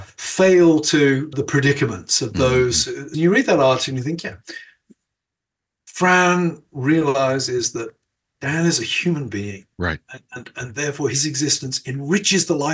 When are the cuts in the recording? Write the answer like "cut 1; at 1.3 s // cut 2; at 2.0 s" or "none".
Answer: cut 1; at 1.3 s // cut 2; at 3.1 s